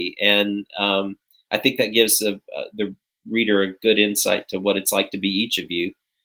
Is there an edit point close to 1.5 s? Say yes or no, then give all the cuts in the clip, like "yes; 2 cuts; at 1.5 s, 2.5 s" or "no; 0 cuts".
no; 0 cuts